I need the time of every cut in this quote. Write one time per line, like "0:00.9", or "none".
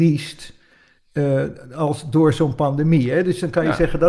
none